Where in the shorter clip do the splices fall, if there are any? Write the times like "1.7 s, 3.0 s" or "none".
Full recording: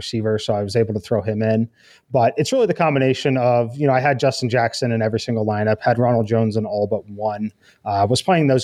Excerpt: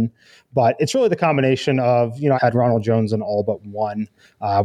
2.4 s